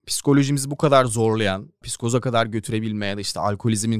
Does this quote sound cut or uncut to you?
cut